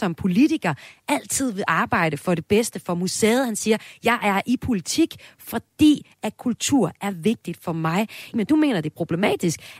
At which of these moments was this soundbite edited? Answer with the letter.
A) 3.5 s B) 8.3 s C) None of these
B